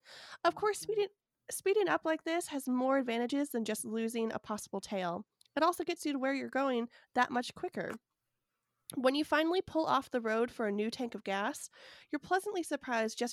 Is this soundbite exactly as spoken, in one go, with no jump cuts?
yes; 0 cuts

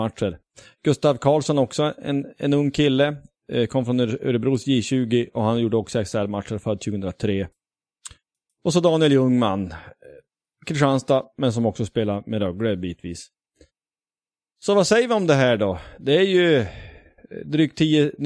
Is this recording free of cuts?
yes; 0 cuts

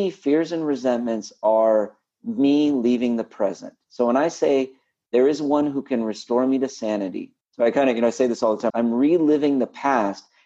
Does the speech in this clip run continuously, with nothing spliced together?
no; 2 cuts; at 7.4 s, 8.7 s

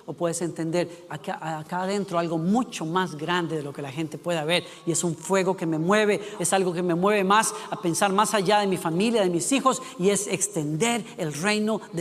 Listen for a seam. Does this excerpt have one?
yes; 2 cuts; at 1.1 s, 6.4 s

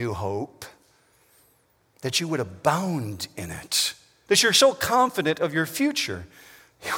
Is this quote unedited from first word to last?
no; 1 cut; at 4.3 s

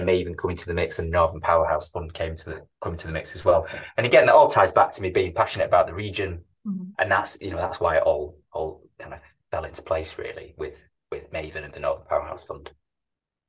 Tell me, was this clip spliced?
yes; 2 cuts; at 6.9 s, 11.7 s

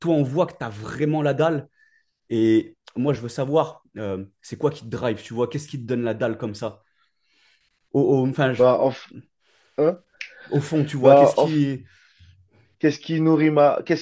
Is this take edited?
no; 0 cuts

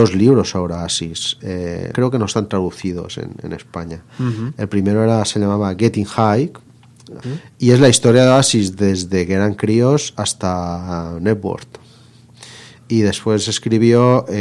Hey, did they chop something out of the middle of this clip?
yes; 2 cuts; at 1.9 s, 7.2 s

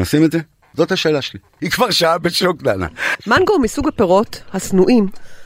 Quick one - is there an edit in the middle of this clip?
yes; 2 cuts; at 1.6 s, 3.1 s

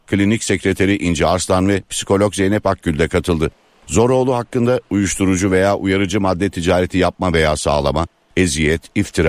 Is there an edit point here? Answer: no; 0 cuts

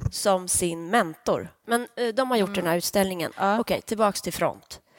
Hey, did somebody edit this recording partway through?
yes; 2 cuts; at 1.6 s, 3.3 s

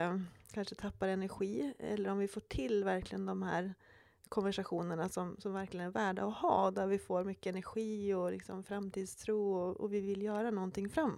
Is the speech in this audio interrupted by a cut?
no; 0 cuts

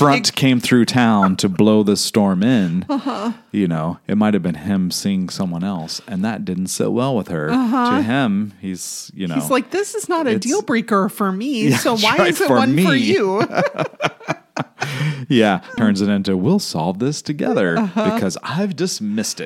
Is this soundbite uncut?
no; 1 cut; at 15.8 s

